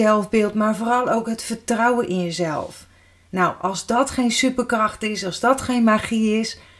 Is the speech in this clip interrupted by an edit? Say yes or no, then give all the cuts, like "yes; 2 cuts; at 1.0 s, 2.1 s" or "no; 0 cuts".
no; 0 cuts